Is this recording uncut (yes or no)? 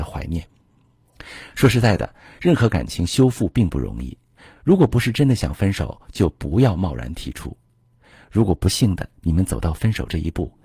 yes